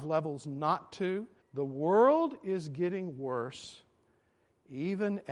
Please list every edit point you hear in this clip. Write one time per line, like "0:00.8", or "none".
0:01.4